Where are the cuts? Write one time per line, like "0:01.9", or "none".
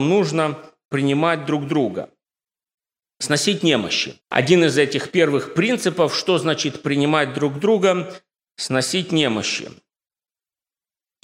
0:04.2